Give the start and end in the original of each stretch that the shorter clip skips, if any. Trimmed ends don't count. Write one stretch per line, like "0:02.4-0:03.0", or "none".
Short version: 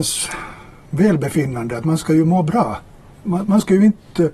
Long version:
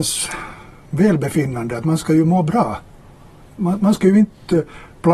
0:03.1-0:03.5